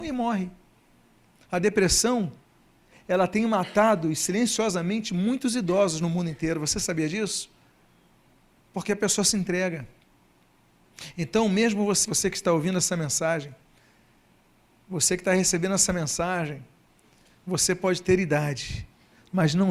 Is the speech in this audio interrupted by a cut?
yes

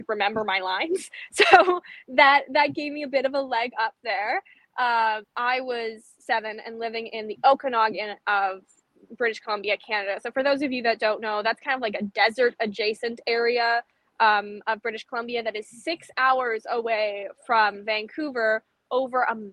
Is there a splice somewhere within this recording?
yes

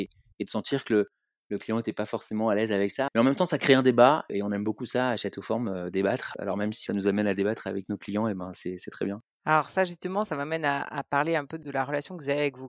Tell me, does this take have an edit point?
yes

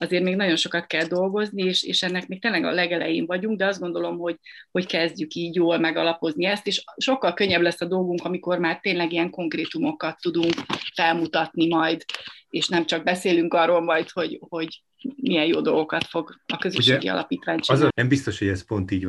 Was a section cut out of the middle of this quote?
yes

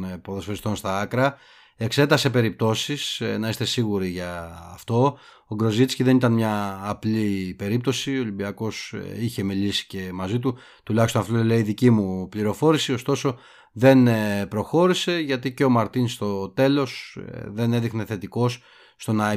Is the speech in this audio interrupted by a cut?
no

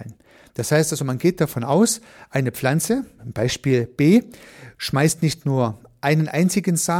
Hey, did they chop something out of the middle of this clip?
yes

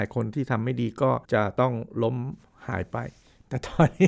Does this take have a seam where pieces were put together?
yes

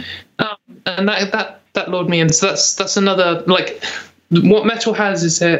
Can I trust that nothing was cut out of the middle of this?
yes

